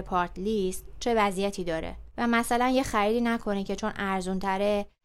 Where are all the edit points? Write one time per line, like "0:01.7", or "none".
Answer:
0:02.1